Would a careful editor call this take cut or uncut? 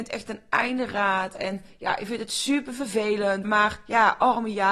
cut